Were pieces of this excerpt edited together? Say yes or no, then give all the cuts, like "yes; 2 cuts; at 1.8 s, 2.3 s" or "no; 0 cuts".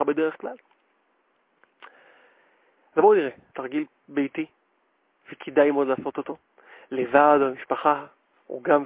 yes; 1 cut; at 3.5 s